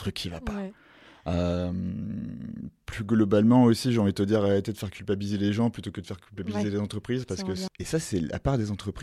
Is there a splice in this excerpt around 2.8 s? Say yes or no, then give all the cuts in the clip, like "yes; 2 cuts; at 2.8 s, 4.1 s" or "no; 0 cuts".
no; 1 cut; at 7.7 s